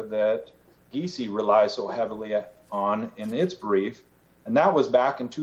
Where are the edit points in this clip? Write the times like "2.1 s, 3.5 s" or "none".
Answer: none